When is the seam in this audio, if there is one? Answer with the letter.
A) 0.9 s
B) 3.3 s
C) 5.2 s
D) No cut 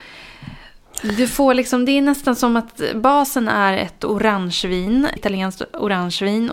C